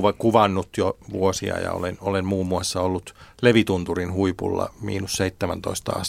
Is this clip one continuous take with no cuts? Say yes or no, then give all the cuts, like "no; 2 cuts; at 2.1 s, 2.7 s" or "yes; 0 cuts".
yes; 0 cuts